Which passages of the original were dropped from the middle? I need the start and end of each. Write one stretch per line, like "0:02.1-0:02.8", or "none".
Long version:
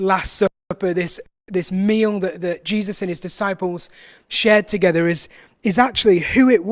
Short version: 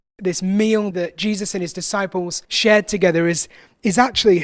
0:02.2-0:02.4
0:03.9-0:04.2